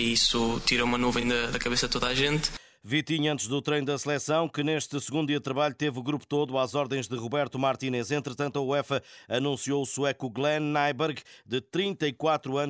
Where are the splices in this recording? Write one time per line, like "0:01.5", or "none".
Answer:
none